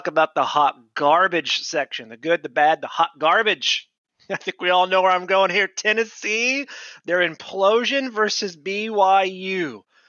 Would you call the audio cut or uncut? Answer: uncut